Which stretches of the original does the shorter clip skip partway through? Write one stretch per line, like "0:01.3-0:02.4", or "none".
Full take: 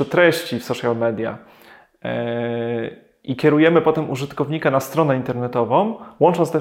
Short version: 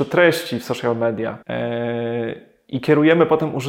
0:01.4-0:02.0